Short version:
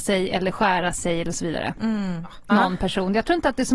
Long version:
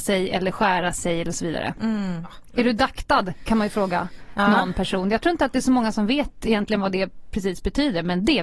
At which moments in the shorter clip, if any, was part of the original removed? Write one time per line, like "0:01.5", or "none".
0:02.5